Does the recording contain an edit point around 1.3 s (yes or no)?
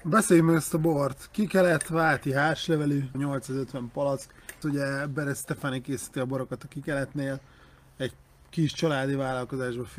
no